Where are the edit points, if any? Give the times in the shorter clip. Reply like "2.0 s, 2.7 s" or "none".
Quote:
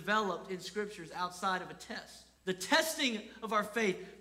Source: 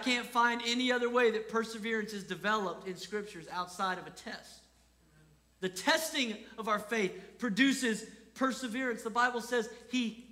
2.4 s